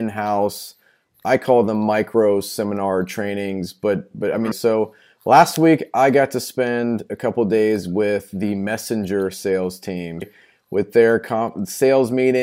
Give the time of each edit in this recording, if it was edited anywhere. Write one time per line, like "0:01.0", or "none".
0:04.5
0:10.2